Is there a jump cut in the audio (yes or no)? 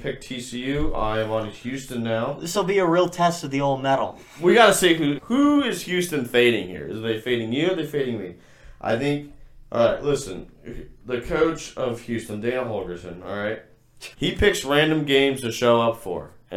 yes